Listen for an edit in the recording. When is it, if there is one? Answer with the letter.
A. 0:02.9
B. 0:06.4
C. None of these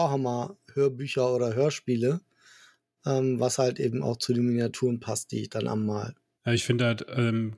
B